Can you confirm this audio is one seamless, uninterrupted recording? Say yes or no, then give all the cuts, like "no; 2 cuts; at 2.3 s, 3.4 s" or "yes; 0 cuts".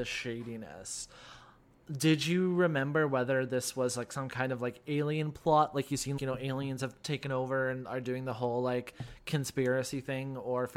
no; 1 cut; at 6.2 s